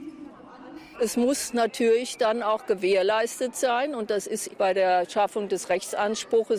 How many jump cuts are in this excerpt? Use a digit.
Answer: 2